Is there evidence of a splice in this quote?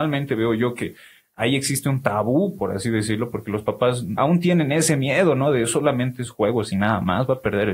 yes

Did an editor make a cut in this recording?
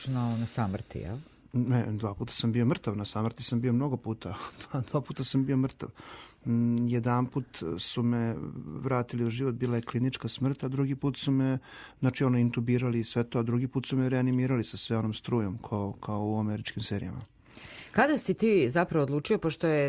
no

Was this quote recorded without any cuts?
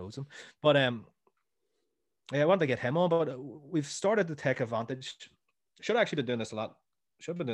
yes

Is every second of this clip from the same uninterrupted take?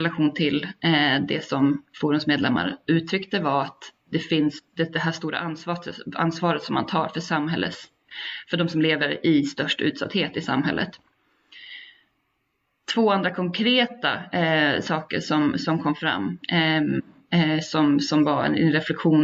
yes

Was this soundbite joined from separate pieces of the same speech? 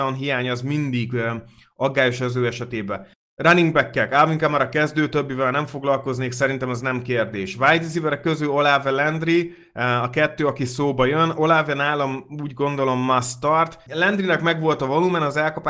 yes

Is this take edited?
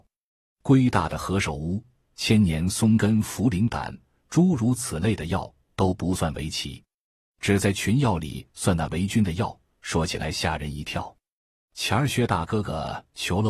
no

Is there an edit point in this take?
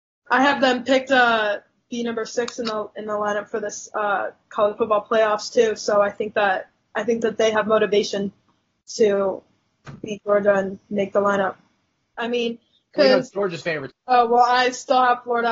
yes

